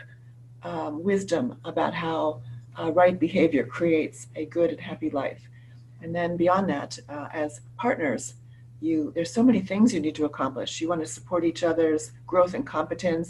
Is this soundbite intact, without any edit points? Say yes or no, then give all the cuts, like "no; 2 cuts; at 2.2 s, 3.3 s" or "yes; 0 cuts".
yes; 0 cuts